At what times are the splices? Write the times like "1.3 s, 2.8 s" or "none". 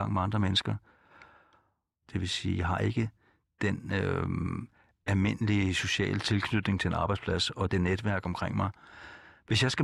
2.0 s